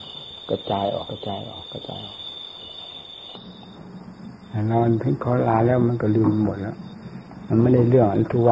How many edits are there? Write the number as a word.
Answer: one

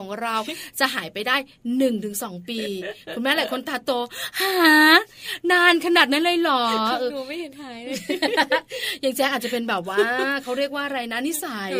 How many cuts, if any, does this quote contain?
zero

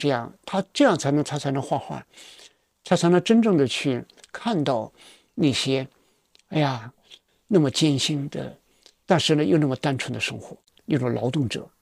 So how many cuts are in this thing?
one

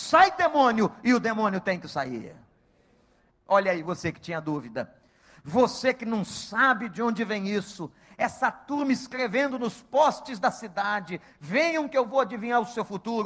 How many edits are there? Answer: one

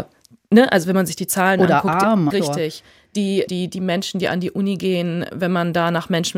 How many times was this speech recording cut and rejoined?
three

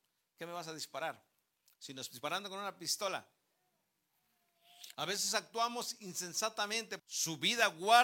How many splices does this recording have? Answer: two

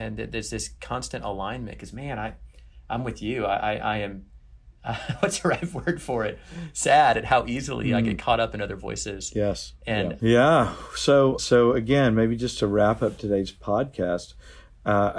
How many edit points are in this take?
two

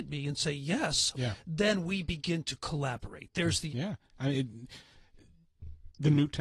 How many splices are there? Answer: two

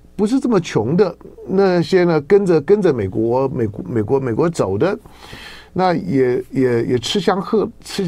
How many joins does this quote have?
zero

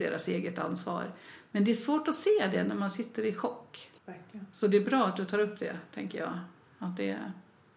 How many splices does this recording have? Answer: one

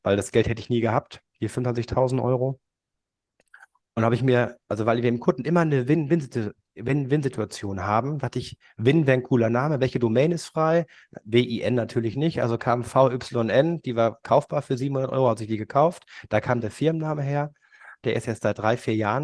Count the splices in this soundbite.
one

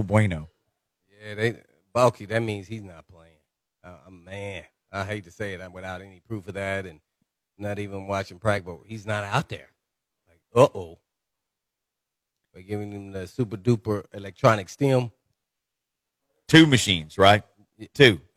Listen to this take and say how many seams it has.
zero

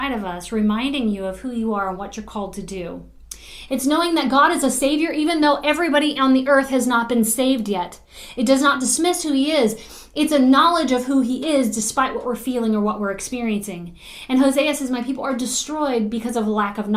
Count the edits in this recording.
one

